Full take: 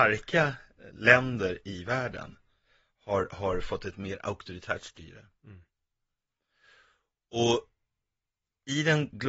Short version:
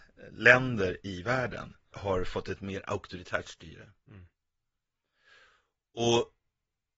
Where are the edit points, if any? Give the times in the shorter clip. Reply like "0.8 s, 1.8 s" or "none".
1.9 s